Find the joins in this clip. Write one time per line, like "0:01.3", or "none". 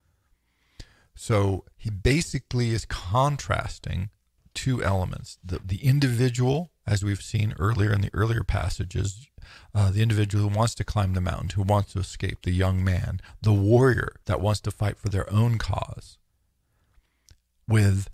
0:01.7
0:05.6
0:14.2